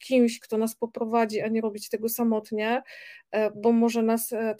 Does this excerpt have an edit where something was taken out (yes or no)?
no